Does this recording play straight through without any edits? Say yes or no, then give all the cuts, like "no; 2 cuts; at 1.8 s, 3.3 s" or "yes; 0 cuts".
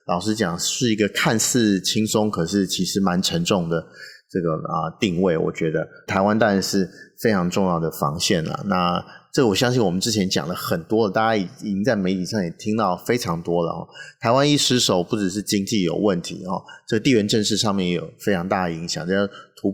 no; 1 cut; at 6.1 s